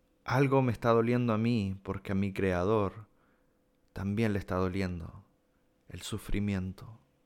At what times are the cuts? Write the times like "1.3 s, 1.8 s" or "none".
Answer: none